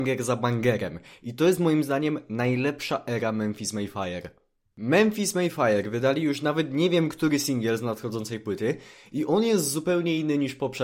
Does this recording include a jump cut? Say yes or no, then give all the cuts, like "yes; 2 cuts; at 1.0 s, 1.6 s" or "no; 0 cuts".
yes; 1 cut; at 4.7 s